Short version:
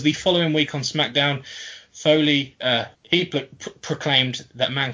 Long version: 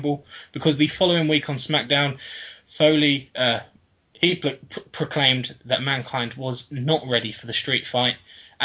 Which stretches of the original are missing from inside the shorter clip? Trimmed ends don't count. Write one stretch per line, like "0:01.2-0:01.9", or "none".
0:03.7-0:04.0